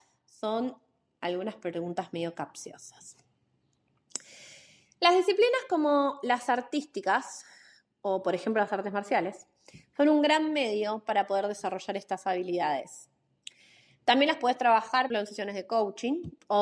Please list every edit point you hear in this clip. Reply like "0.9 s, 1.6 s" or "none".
15.1 s